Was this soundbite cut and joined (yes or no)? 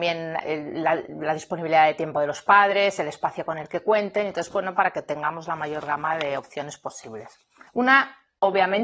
yes